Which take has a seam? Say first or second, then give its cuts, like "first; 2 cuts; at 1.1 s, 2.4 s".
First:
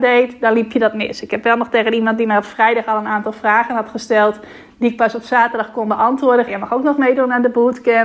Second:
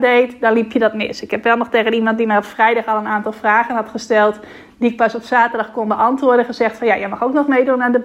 first; 1 cut; at 6.5 s